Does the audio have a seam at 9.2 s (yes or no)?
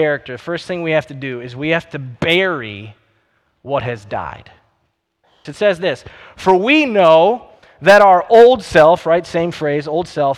no